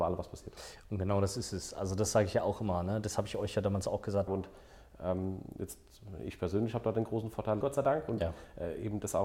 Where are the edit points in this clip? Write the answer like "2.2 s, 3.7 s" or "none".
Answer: 4.3 s, 7.6 s

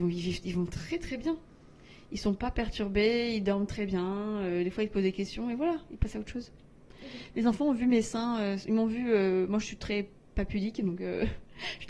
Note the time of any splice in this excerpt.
none

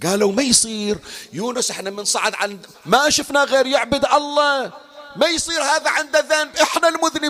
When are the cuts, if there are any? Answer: none

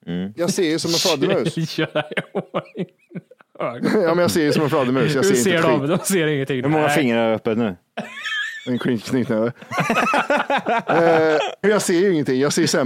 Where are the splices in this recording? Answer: 11.6 s

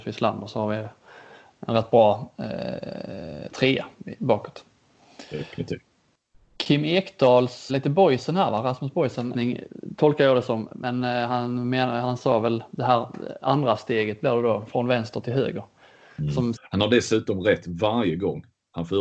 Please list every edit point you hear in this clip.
7.7 s, 9.3 s, 16.6 s

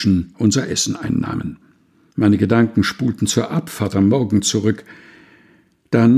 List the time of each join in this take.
2.1 s

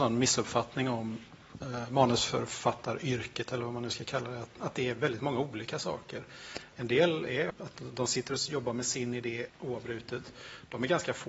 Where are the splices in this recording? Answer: 7.5 s, 9.5 s

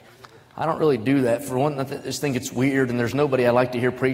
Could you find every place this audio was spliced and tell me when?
none

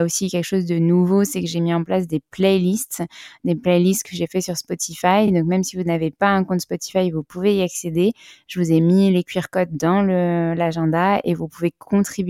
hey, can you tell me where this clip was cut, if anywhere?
none

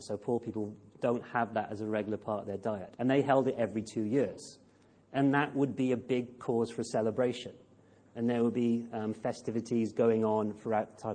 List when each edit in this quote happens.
3.0 s

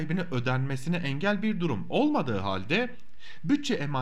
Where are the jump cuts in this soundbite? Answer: none

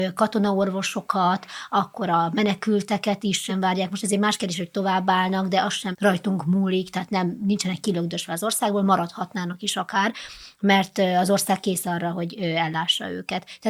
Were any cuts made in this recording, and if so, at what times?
3.5 s, 5.9 s

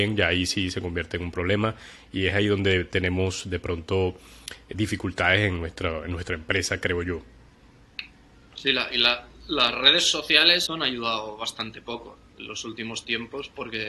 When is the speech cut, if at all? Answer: 10.7 s

